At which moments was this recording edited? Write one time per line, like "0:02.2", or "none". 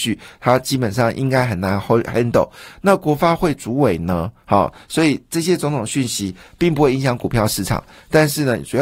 none